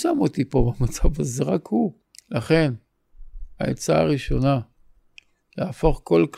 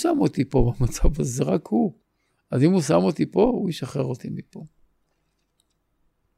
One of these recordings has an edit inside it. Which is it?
first; 1 cut; at 2.1 s

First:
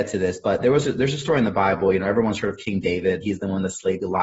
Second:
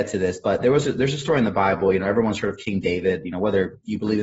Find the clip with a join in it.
first; 1 cut; at 3.2 s

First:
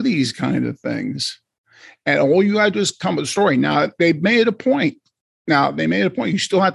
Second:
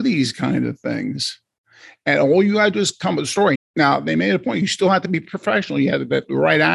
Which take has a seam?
second; 1 cut; at 3.5 s

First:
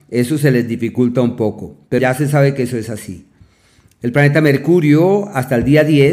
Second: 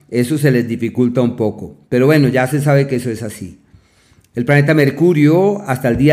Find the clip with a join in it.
first; 1 cut; at 2.0 s

